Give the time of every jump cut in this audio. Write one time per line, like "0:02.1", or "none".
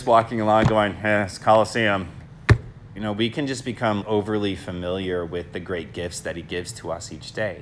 0:03.0
0:04.0